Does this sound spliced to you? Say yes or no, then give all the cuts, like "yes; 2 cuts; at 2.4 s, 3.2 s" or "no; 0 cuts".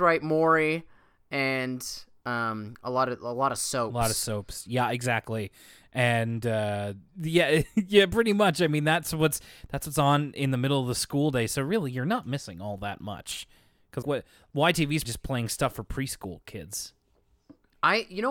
yes; 2 cuts; at 14.0 s, 15.0 s